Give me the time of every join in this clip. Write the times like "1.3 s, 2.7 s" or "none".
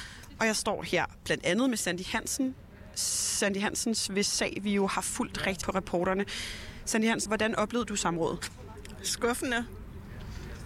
5.6 s, 7.3 s